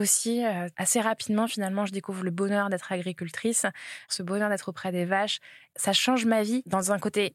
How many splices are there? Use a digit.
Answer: 1